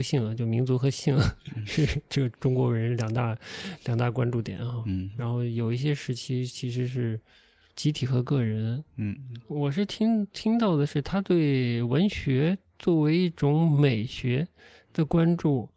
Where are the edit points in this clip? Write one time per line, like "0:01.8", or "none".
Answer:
none